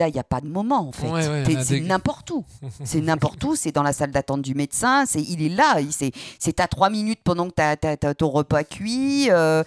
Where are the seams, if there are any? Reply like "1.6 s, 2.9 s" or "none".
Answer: none